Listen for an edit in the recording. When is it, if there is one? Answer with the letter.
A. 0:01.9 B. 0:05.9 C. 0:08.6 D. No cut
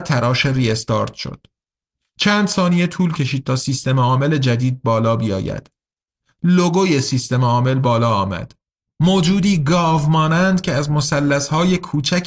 D